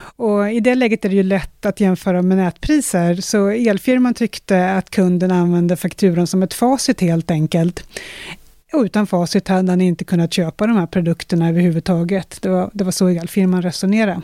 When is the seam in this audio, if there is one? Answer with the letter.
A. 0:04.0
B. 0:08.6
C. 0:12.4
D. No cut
D